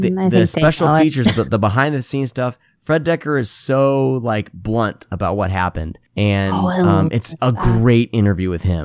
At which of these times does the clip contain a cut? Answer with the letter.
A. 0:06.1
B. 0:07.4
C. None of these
A